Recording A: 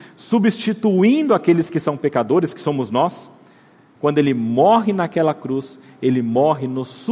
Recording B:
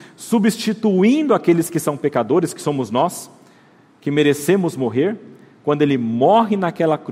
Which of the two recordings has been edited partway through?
A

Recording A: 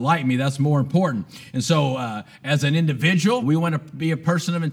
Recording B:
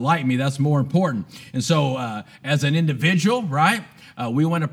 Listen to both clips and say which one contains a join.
A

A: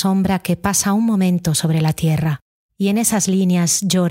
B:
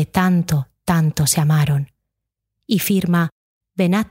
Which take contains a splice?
A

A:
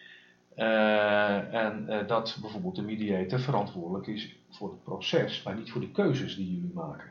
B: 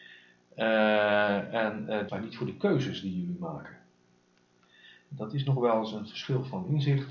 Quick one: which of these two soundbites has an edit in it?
B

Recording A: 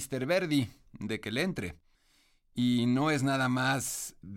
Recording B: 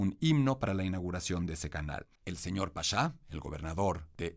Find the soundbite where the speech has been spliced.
B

